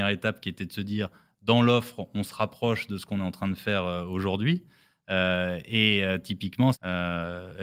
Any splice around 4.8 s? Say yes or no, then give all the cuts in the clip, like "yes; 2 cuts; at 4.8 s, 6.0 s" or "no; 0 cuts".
no; 1 cut; at 6.7 s